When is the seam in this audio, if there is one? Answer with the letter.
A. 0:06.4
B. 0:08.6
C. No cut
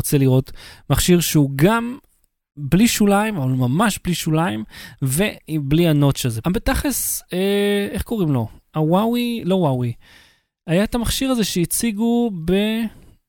A